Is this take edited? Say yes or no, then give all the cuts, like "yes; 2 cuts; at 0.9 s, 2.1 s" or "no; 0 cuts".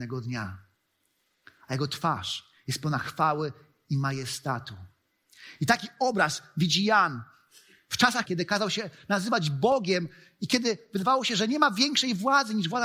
yes; 1 cut; at 8.3 s